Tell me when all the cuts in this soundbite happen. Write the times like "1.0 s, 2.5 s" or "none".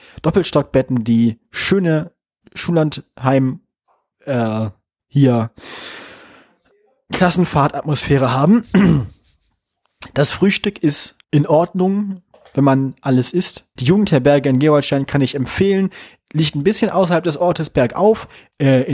11.2 s, 13.8 s